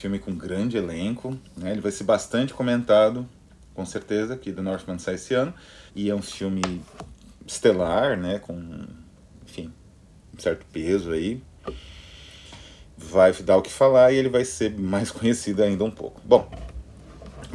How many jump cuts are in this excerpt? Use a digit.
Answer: 1